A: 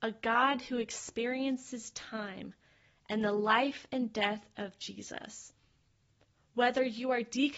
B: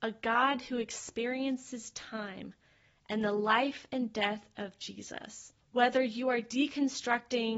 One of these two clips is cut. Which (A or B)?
B